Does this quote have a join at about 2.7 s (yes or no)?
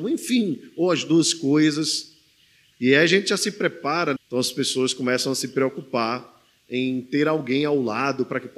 yes